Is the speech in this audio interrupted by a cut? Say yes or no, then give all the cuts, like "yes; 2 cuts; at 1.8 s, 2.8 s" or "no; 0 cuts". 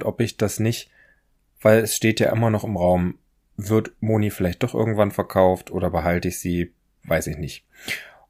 no; 0 cuts